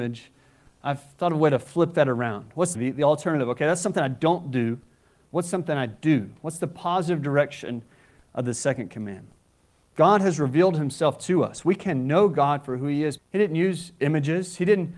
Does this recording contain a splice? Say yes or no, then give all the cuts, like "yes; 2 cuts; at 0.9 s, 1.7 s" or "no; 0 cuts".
yes; 2 cuts; at 2.7 s, 13.2 s